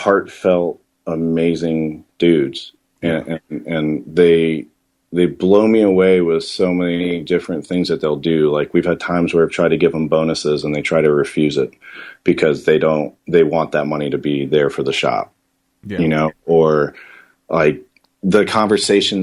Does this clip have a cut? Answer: yes; 1 cut; at 2.1 s

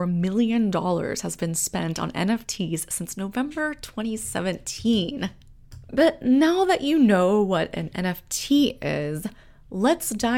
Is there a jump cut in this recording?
no; 0 cuts

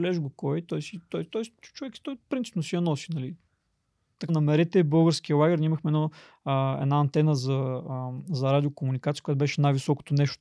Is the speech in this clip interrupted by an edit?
yes; 1 cut; at 4.3 s

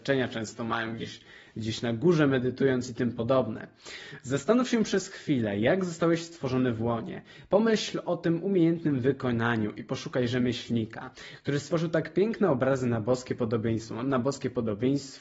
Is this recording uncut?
yes; 0 cuts

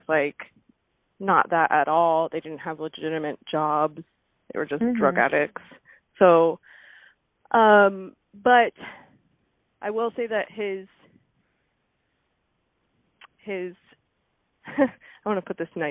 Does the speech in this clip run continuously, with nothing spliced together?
yes; 0 cuts

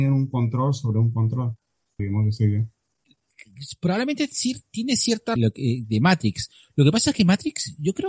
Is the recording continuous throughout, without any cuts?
no; 2 cuts; at 2.0 s, 5.4 s

